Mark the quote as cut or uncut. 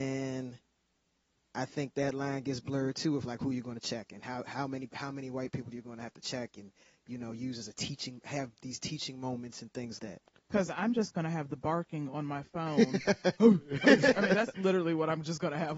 cut